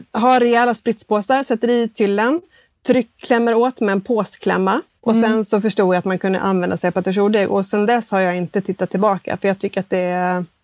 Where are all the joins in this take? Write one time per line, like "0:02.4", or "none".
0:05.0

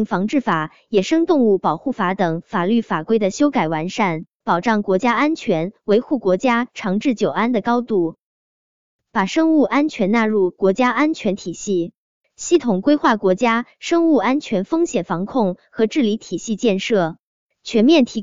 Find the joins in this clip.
0:04.4

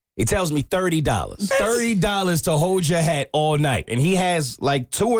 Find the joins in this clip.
0:01.5
0:03.9

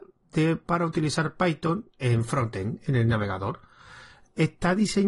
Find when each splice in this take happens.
none

